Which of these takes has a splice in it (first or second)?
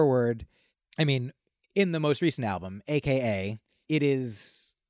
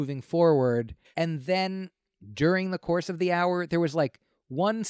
second